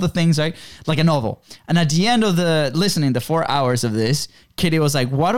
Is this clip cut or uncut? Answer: uncut